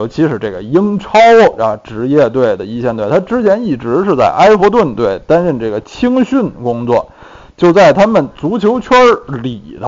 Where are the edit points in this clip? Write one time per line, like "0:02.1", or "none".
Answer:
none